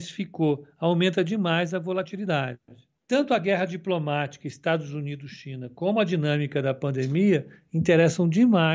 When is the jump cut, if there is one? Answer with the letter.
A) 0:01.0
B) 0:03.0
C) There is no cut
B